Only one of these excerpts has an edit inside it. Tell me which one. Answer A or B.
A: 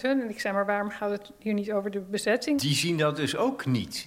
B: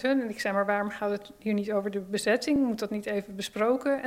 A